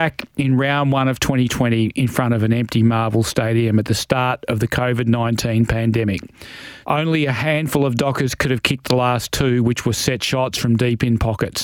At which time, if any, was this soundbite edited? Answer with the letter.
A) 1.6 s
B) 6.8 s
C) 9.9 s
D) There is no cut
B